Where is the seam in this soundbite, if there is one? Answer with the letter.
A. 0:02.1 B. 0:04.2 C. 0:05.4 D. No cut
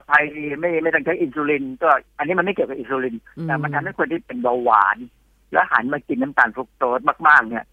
A